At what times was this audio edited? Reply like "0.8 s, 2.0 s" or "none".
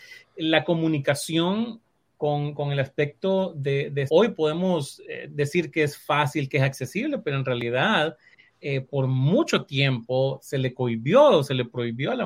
4.1 s